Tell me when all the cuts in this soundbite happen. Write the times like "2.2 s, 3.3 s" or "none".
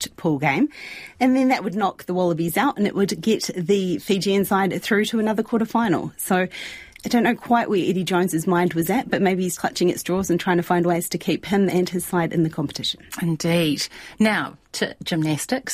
9.5 s